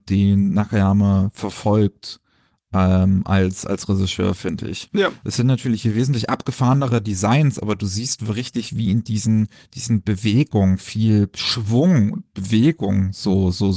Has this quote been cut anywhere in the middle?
no; 0 cuts

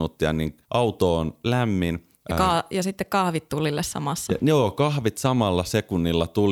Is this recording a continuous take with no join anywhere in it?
yes; 0 cuts

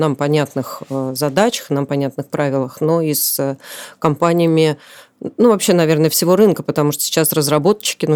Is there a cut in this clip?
no; 0 cuts

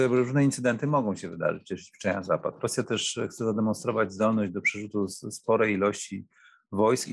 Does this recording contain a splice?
no; 0 cuts

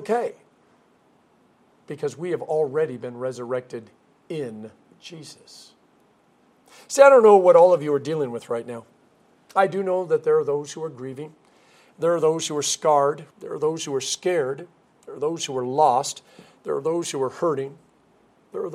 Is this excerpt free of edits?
no; 1 cut; at 13.3 s

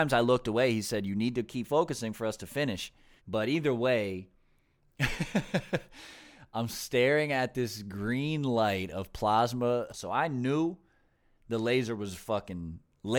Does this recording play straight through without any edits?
no; 2 cuts; at 3.2 s, 9.9 s

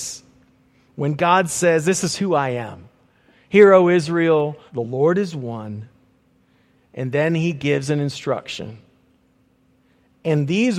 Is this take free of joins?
no; 2 cuts; at 4.7 s, 6.8 s

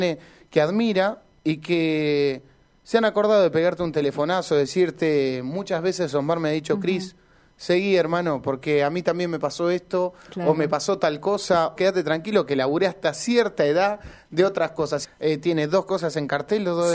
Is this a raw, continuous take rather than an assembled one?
no; 2 cuts; at 11.8 s, 15.0 s

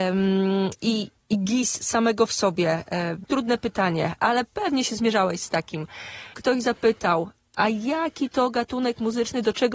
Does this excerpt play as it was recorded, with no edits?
no; 2 cuts; at 3.2 s, 6.3 s

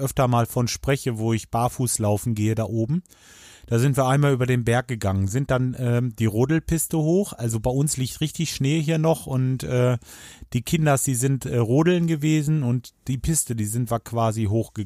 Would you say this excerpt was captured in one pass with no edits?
yes; 0 cuts

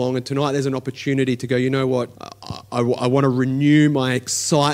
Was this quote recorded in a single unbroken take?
no; 1 cut; at 2.1 s

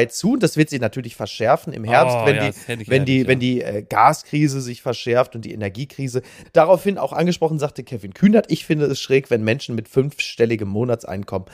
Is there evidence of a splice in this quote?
yes; 1 cut; at 6.4 s

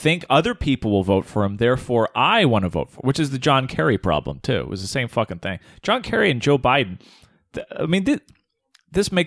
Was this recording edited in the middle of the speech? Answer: no; 0 cuts

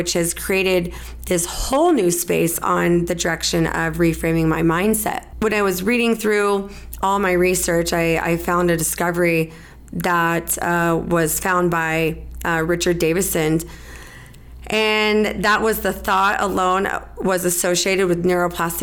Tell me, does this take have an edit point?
no; 0 cuts

